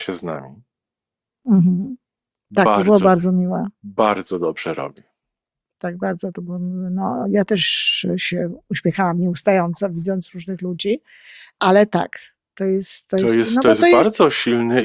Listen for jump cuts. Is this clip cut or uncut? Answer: uncut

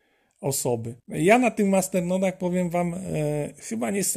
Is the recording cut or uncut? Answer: cut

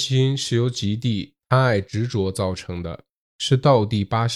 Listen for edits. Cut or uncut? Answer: cut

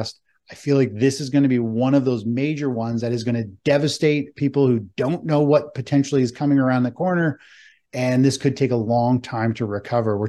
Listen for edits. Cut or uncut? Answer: uncut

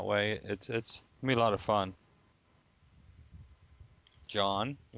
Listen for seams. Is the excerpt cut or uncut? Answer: cut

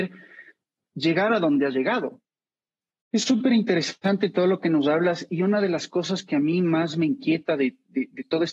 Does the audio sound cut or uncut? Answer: cut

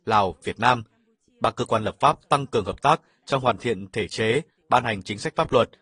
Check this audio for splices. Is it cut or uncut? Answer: uncut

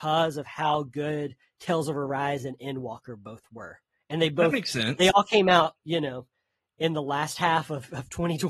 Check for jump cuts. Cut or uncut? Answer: uncut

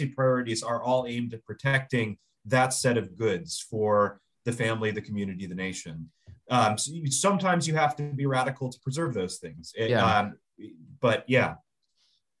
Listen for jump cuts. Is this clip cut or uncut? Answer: uncut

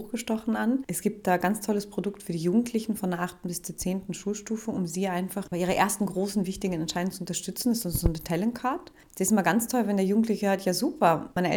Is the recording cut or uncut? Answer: uncut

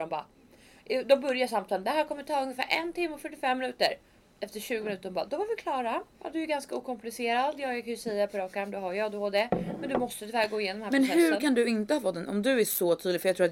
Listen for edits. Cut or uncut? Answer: cut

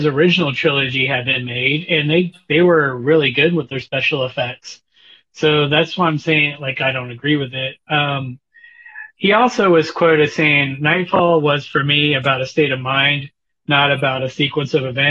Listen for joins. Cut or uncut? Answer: uncut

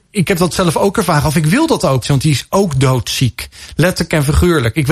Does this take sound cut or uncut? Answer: cut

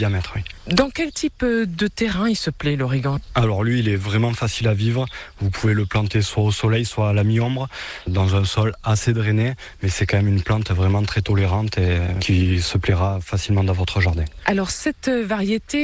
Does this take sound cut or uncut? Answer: cut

